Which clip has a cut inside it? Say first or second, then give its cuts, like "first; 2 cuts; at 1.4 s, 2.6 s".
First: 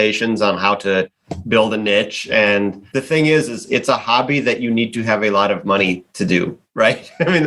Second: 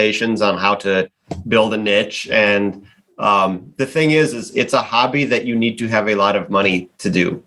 first; 1 cut; at 2.9 s